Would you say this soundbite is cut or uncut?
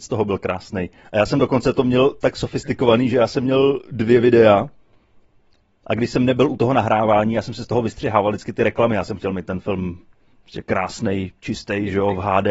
uncut